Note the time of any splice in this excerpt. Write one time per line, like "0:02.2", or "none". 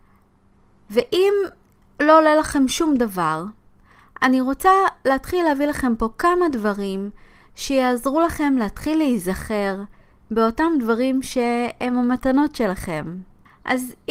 none